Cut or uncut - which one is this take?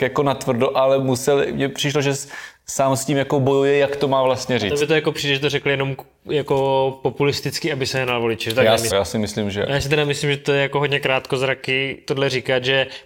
cut